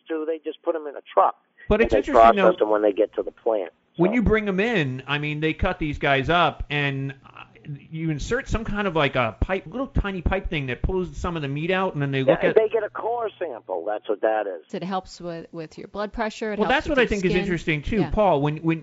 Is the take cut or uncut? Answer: cut